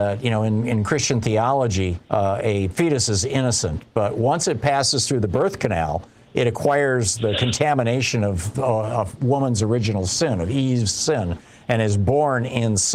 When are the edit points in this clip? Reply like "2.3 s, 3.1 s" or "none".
2.0 s, 8.5 s